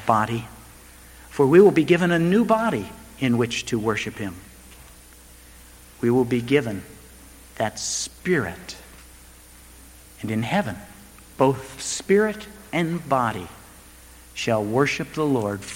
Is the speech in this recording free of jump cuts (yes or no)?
yes